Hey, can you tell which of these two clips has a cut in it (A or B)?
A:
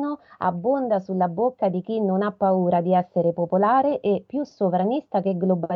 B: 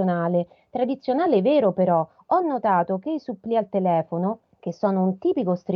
B